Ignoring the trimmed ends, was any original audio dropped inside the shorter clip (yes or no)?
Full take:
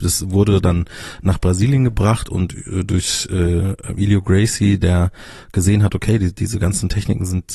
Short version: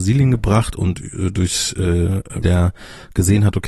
yes